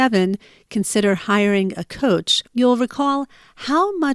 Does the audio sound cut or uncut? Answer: cut